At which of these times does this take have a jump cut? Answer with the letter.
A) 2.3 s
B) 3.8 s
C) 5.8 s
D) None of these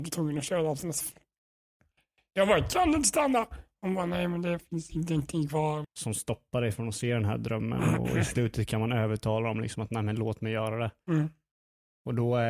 C